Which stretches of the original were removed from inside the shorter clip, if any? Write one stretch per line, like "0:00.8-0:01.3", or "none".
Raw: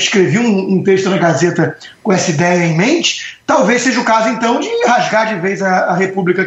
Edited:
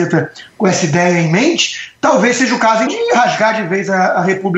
0:04.3-0:04.6